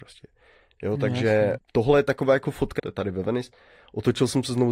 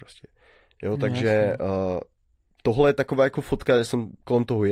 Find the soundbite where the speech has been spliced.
first; 2 cuts; at 1.6 s, 2.8 s

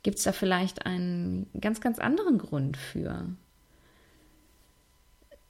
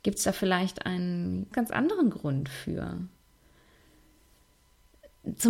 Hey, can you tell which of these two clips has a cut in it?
second; 1 cut; at 1.5 s

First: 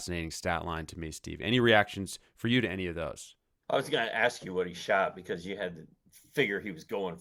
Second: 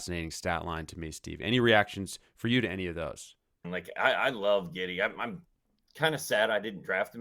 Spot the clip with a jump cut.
second; 1 cut; at 3.6 s

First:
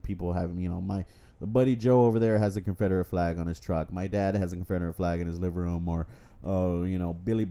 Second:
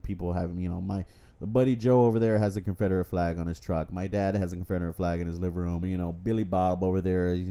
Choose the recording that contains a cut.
second; 1 cut; at 5.8 s

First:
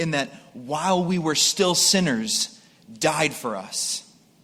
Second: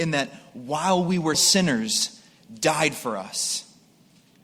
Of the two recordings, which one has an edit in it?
second; 1 cut; at 1.3 s

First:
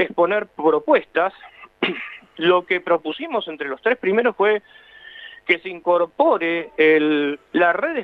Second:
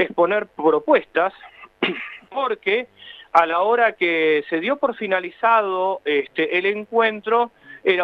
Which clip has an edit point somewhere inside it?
second; 1 cut; at 2.3 s

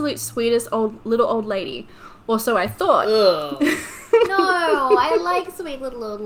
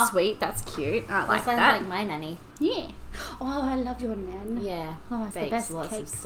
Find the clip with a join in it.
second; 1 cut; at 5.3 s

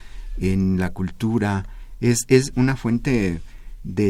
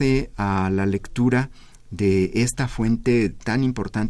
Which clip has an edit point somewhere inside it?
first; 1 cut; at 2.5 s

